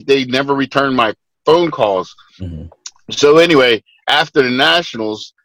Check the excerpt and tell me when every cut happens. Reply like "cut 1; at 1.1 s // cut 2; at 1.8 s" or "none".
none